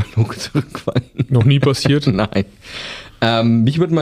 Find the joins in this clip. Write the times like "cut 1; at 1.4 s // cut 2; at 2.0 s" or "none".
none